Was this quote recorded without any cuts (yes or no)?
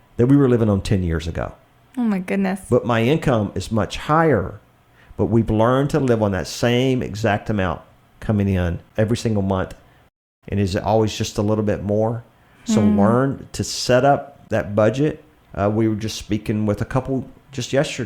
no